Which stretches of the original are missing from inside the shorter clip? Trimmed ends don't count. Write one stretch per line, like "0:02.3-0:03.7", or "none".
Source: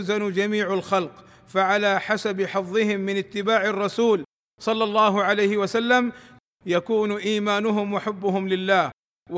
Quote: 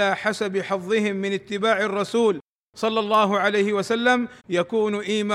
0:06.2-0:06.6